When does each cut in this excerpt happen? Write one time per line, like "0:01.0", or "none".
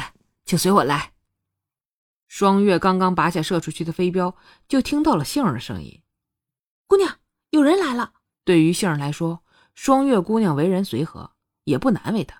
0:08.3